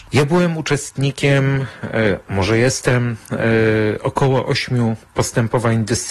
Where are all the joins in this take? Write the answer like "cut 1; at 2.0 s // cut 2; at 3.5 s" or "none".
none